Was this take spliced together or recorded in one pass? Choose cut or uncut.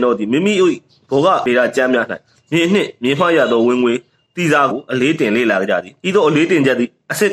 cut